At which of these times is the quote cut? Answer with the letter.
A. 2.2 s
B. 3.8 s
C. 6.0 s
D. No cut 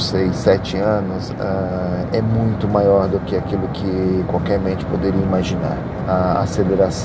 C